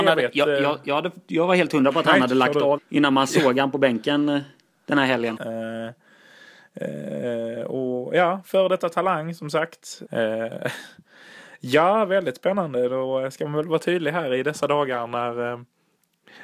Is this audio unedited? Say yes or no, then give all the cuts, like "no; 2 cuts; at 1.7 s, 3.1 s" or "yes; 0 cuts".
no; 3 cuts; at 2.8 s, 5.4 s, 10.0 s